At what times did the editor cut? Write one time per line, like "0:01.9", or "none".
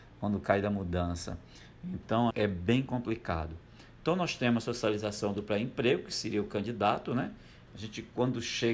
0:02.3
0:07.7

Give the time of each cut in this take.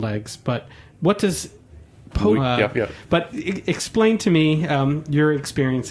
0:02.4

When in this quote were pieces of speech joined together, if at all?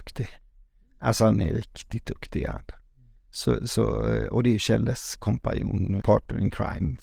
0:06.0

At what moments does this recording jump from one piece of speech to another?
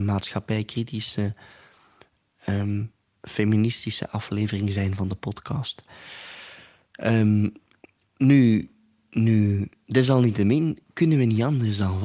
none

